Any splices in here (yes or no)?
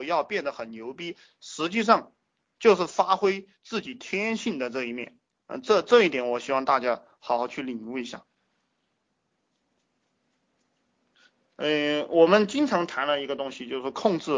no